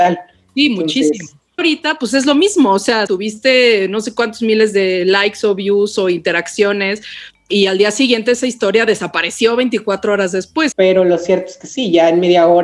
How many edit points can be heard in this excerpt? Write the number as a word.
three